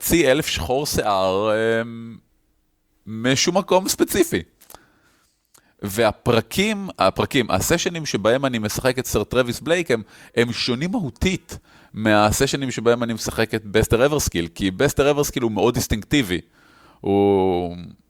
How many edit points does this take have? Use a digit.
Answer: 0